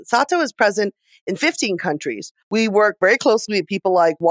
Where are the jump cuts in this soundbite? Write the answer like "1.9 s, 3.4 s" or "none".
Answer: 2.4 s